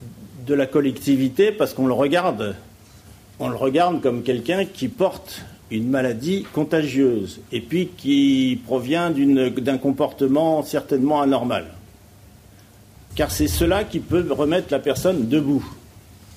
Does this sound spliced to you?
yes; 1 cut; at 13.1 s

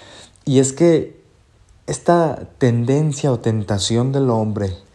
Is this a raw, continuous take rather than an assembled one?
yes; 0 cuts

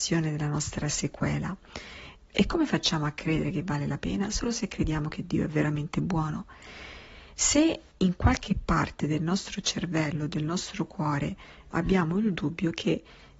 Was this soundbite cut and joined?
yes; 2 cuts; at 2.2 s, 11.7 s

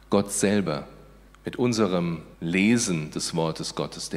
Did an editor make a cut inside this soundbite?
yes; 2 cuts; at 1.3 s, 2.3 s

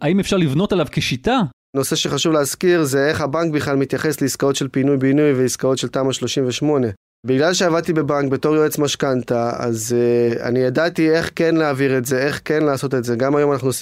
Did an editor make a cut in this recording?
yes; 1 cut; at 1.7 s

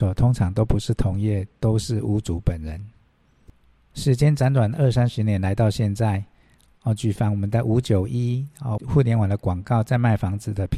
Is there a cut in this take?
yes; 1 cut; at 8.8 s

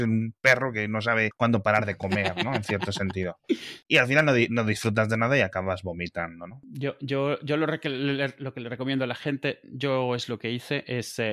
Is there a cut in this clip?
no; 0 cuts

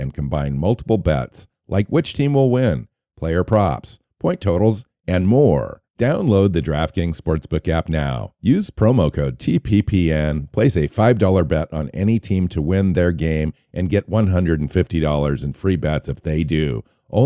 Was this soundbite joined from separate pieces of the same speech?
yes; 1 cut; at 5.9 s

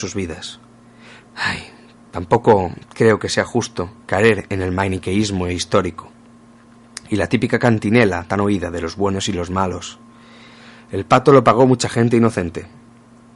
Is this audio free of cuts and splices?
no; 2 cuts; at 1.2 s, 4.0 s

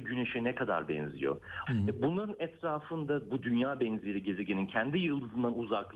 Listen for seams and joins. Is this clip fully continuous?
no; 1 cut; at 1.7 s

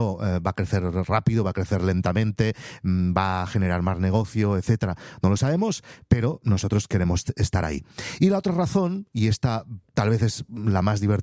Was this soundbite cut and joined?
no; 0 cuts

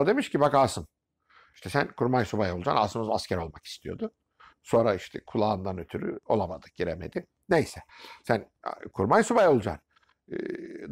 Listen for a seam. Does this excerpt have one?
no; 0 cuts

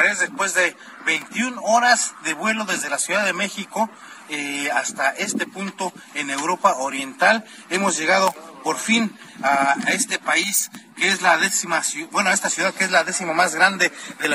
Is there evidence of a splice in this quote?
no; 0 cuts

